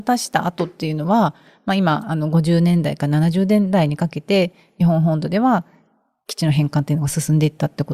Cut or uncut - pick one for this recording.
uncut